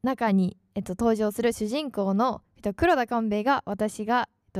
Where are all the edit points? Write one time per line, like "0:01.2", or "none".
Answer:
none